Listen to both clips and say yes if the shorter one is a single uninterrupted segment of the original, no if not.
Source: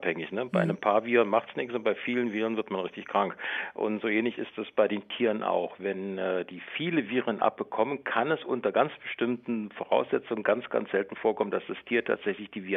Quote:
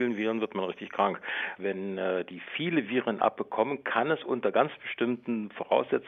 no